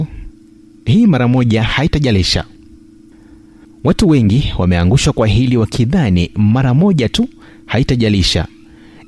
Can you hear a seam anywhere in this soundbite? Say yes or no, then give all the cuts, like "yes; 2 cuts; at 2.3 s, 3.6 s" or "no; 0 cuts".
no; 0 cuts